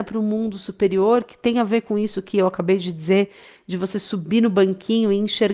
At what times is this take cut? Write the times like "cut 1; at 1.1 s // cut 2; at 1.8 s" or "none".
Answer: none

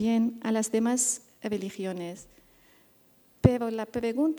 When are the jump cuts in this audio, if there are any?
none

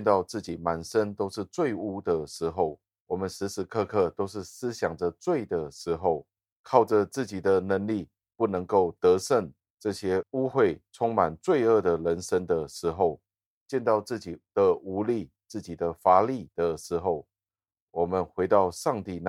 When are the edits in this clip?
none

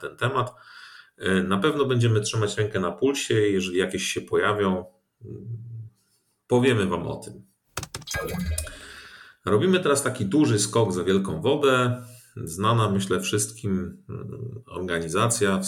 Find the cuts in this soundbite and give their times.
none

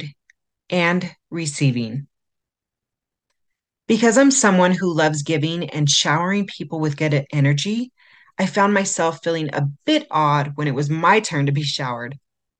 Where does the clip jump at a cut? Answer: none

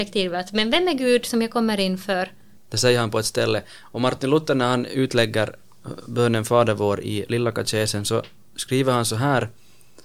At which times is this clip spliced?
cut 1; at 2.5 s

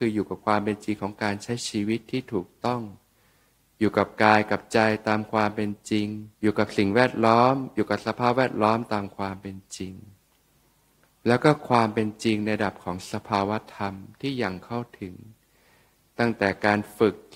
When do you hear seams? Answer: cut 1; at 6.3 s

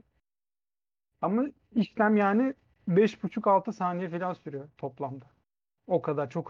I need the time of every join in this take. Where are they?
none

